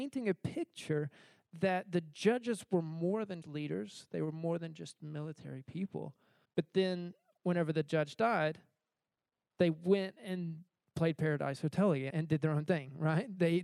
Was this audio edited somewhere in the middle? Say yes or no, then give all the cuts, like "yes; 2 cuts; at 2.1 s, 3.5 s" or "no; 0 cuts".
yes; 3 cuts; at 3.4 s, 6.4 s, 12.1 s